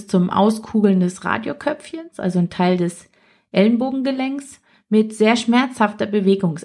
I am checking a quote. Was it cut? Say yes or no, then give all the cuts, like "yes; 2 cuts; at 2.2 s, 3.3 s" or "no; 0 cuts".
no; 0 cuts